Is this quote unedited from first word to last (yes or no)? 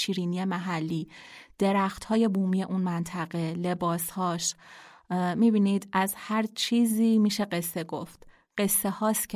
yes